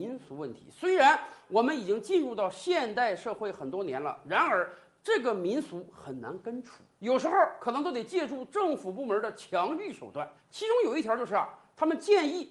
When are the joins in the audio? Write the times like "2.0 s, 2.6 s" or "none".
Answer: 10.4 s